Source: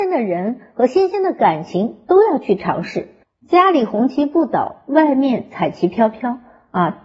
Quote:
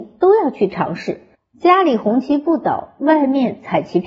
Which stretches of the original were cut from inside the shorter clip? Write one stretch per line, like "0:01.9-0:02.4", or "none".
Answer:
none